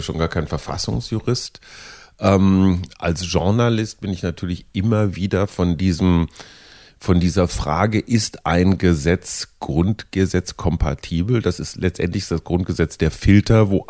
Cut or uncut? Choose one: uncut